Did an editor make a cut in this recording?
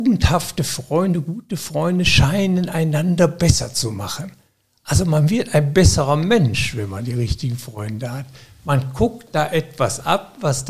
no; 0 cuts

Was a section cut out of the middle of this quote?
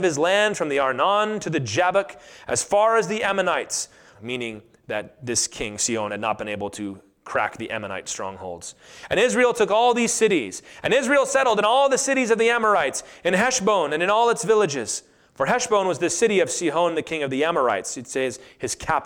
yes; 1 cut; at 4.1 s

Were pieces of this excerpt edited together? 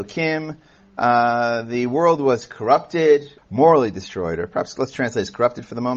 yes; 1 cut; at 3.4 s

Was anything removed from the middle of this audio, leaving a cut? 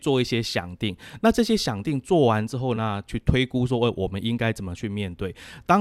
no; 0 cuts

